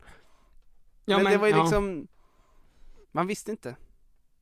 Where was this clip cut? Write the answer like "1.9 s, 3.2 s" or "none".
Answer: 3.0 s